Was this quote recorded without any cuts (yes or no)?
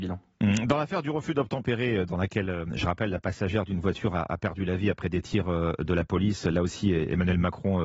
yes